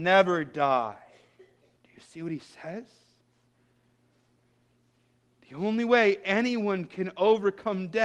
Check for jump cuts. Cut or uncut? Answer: cut